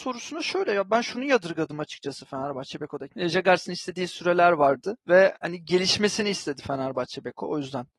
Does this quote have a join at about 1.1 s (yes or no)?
no